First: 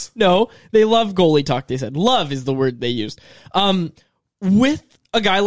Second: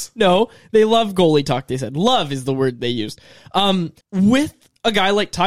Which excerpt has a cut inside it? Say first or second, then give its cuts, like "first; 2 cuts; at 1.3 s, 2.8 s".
second; 1 cut; at 4.0 s